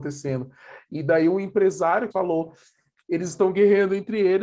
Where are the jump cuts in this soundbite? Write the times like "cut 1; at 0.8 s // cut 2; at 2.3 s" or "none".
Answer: cut 1; at 2.1 s